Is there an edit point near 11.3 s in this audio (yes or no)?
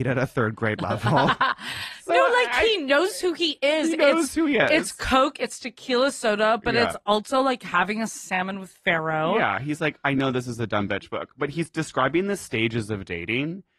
no